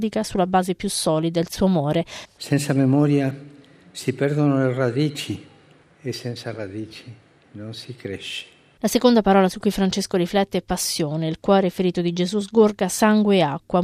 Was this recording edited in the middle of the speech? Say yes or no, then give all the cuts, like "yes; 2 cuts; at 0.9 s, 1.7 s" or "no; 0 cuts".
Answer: yes; 2 cuts; at 2.3 s, 8.8 s